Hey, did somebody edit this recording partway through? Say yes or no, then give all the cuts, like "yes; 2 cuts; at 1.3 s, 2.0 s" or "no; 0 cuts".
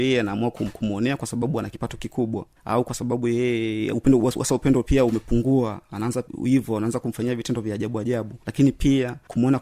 no; 0 cuts